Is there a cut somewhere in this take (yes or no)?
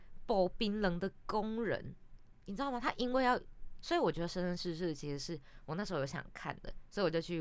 yes